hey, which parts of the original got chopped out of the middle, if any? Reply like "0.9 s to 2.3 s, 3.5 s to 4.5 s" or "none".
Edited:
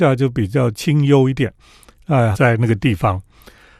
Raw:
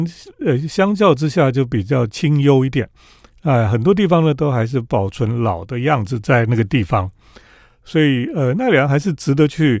3.7 s to 6.2 s